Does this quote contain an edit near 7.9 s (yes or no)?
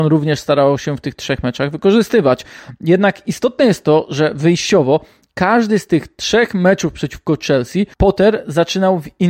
yes